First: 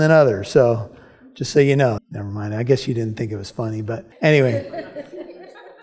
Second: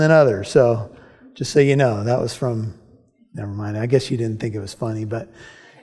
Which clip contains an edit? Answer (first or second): first